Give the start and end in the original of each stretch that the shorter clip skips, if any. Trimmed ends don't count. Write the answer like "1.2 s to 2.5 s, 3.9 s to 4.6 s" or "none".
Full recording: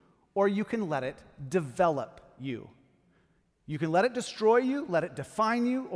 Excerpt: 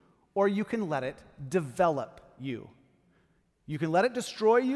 none